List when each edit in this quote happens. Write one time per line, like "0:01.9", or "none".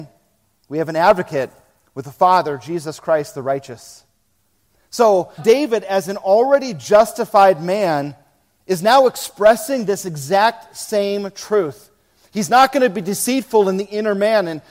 0:05.4